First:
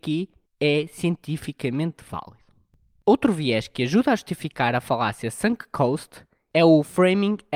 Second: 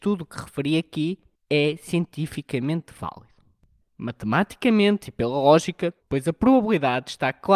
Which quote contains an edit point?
second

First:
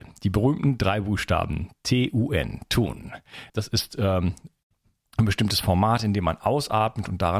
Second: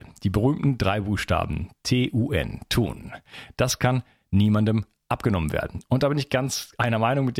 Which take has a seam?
first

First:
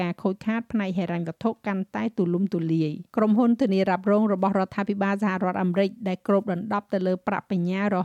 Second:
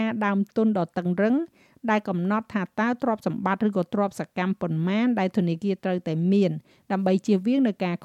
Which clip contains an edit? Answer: first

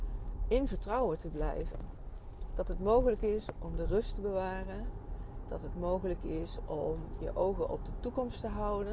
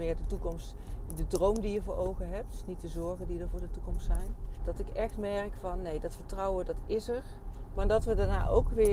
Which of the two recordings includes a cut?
second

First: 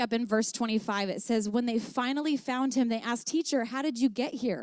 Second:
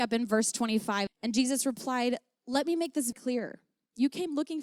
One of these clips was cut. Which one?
second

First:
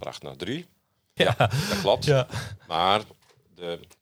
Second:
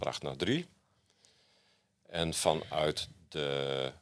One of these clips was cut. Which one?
first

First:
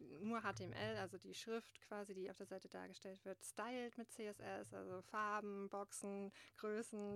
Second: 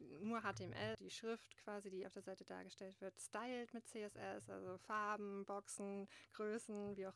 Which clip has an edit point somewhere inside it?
second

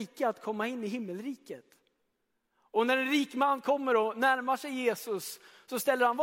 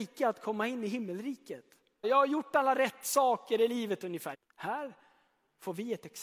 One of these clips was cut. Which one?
second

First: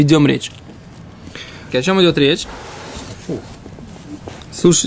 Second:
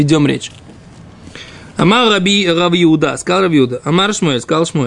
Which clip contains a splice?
first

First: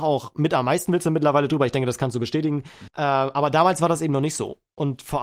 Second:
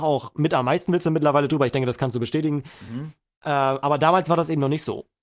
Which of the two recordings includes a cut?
first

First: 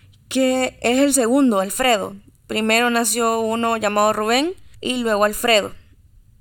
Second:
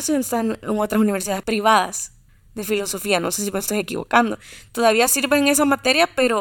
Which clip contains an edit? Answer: first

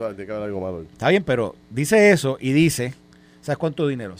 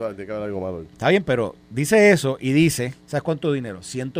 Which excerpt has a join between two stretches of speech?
second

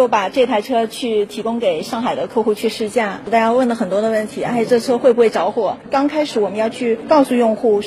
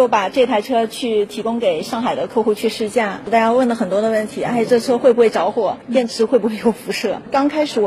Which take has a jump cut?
first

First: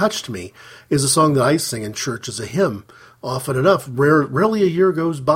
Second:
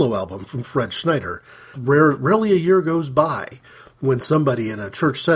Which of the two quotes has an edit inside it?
second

